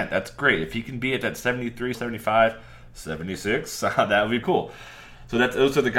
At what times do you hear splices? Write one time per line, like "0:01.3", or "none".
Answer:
0:01.9
0:04.4